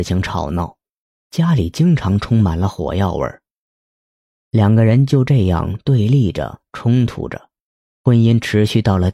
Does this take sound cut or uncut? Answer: uncut